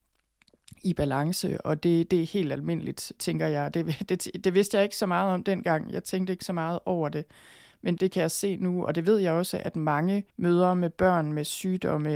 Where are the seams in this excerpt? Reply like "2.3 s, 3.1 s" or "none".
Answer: 8.0 s, 10.3 s